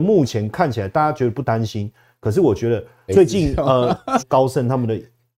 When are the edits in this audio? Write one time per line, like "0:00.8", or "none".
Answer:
0:03.1
0:04.2